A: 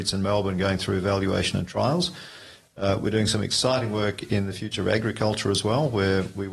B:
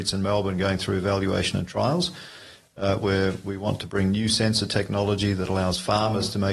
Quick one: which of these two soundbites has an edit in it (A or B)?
B